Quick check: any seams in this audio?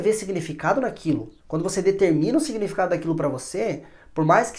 yes; 1 cut; at 1.4 s

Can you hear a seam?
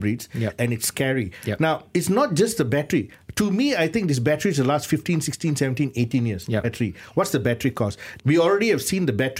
yes; 2 cuts; at 6.6 s, 8.2 s

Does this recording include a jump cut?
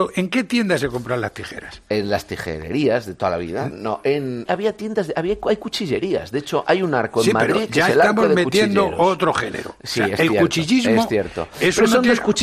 yes; 1 cut; at 4.5 s

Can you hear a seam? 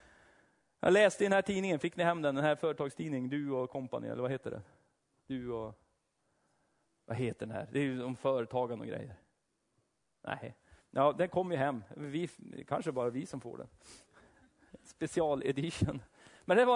no; 0 cuts

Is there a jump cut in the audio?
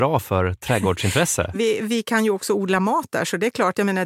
yes; 1 cut; at 1.5 s

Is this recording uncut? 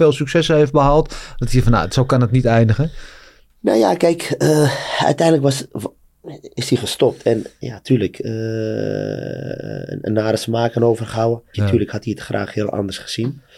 no; 1 cut; at 11.5 s

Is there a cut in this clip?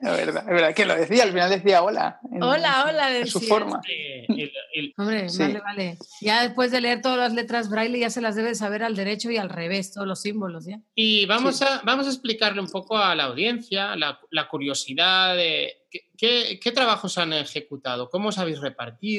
yes; 1 cut; at 4.9 s

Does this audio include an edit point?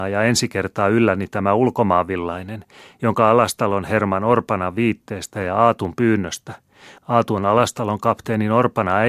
no; 0 cuts

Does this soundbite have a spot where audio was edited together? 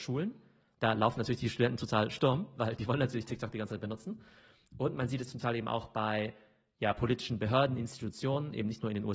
yes; 1 cut; at 5.3 s

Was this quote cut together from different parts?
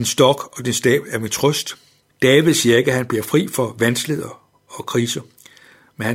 yes; 1 cut; at 2.0 s

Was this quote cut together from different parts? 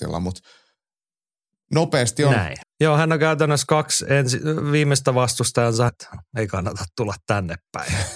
yes; 2 cuts; at 2.6 s, 5.9 s

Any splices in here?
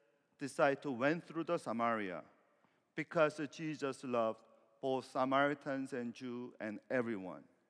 no; 0 cuts

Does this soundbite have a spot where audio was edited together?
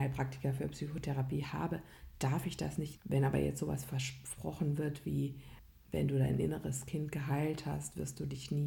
yes; 1 cut; at 3.0 s

